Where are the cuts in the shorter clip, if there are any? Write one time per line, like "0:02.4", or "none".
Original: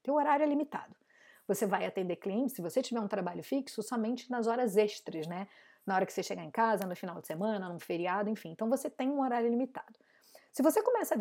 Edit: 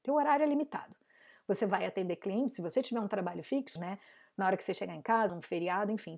0:03.8
0:05.3